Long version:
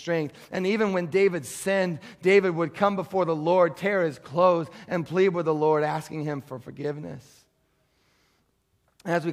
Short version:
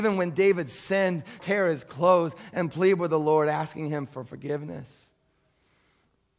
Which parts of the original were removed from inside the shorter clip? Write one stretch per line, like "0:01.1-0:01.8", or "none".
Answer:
0:02.2-0:03.7